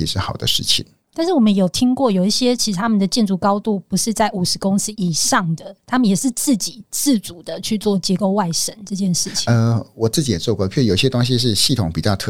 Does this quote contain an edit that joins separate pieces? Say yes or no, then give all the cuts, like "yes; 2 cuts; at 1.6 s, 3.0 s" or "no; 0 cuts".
yes; 1 cut; at 1.0 s